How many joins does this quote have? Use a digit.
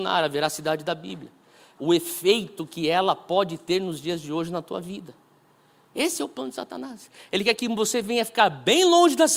1